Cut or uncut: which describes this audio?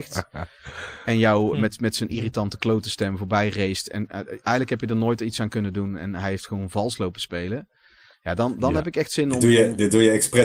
uncut